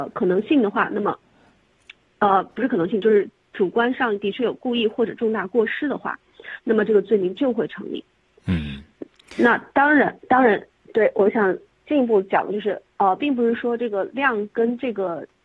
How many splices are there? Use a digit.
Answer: 1